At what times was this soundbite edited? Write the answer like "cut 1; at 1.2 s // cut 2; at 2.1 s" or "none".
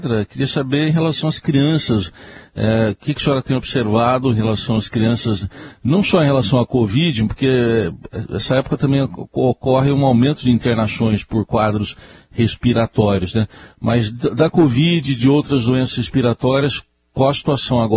none

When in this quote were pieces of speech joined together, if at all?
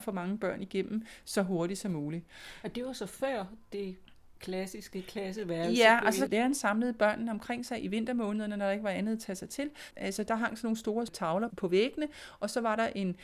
cut 1; at 6.3 s // cut 2; at 9.9 s // cut 3; at 11.5 s

